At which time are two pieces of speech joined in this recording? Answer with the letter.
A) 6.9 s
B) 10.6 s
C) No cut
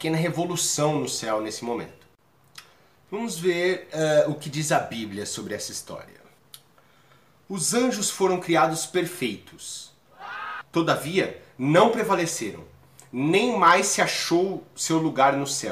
B